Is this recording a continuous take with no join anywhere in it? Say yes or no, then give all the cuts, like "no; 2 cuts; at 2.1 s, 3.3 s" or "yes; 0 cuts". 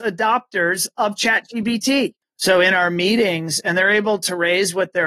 no; 1 cut; at 2.2 s